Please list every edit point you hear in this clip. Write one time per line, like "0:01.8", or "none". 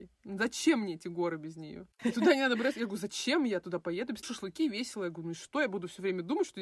0:02.0